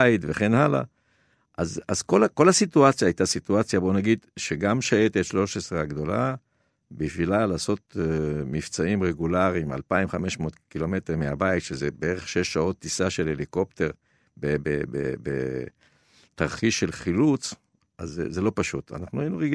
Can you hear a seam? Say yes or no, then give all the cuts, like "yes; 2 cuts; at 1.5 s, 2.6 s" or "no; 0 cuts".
no; 0 cuts